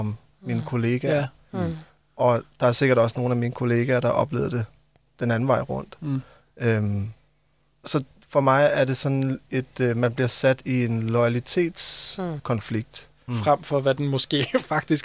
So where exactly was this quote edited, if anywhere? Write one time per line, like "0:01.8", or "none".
0:13.3